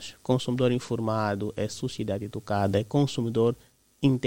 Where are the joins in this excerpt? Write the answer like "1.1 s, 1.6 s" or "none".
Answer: none